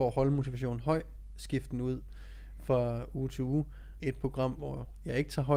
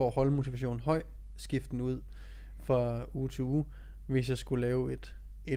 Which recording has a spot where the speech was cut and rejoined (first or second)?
first